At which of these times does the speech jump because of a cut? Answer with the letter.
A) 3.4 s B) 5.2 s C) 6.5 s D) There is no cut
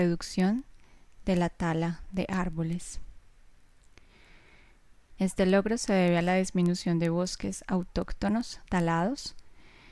B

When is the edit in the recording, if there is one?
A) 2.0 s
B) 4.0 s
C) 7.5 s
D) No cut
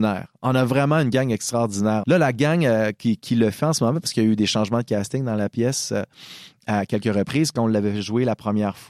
A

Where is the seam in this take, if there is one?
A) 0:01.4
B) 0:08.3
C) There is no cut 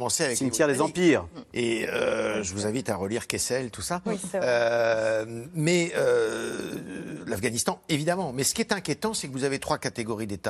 C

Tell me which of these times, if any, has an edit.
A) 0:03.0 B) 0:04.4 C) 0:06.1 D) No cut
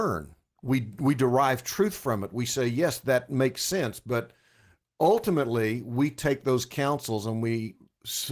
D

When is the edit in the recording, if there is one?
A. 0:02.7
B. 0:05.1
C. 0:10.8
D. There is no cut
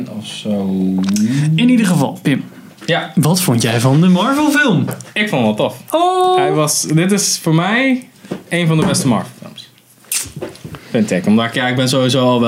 D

